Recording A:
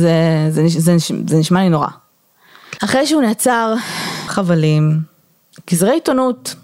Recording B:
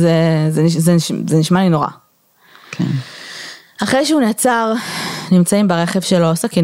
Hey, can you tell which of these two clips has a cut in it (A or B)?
A